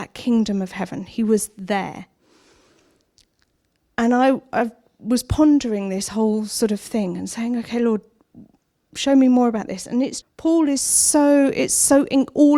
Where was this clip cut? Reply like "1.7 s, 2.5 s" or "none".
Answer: 10.2 s